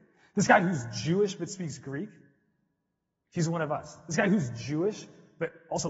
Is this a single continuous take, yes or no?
yes